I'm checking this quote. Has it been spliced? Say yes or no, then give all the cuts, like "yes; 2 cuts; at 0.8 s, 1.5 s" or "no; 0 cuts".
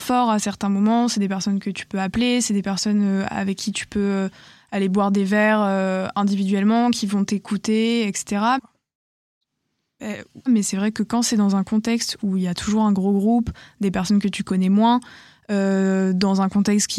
yes; 2 cuts; at 8.6 s, 10.5 s